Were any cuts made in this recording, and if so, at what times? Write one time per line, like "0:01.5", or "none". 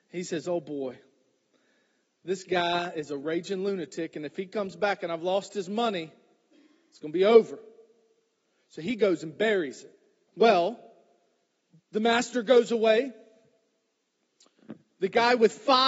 0:10.3